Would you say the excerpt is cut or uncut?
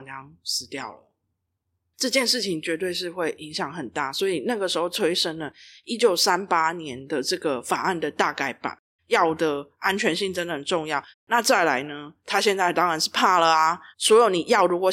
cut